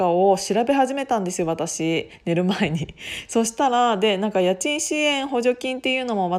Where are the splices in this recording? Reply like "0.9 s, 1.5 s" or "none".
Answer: none